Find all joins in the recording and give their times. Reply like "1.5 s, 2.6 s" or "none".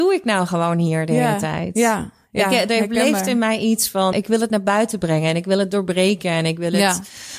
4.1 s